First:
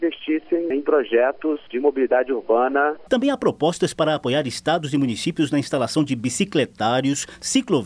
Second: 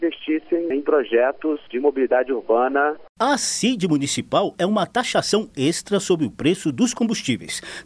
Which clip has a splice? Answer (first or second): first